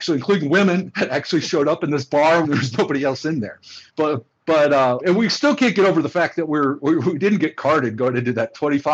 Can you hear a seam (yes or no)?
yes